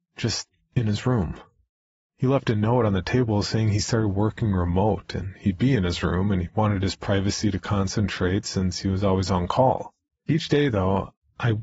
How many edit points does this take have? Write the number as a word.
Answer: one